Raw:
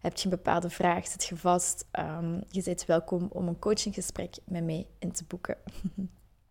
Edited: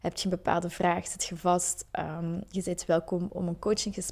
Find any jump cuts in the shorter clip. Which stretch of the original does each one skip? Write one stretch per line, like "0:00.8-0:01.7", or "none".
none